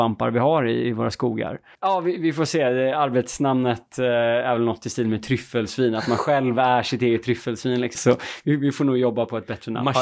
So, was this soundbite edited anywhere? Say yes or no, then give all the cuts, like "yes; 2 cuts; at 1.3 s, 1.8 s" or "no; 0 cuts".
yes; 2 cuts; at 1.8 s, 7.9 s